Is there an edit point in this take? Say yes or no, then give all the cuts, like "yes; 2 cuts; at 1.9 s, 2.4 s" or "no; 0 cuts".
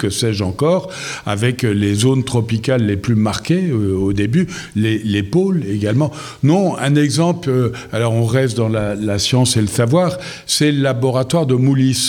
no; 0 cuts